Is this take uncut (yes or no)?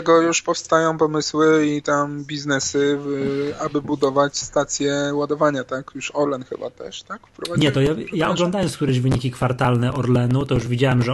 yes